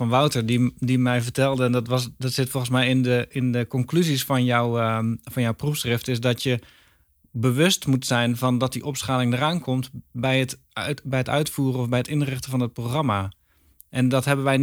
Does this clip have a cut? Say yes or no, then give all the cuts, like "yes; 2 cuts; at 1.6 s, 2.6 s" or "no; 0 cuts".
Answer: no; 0 cuts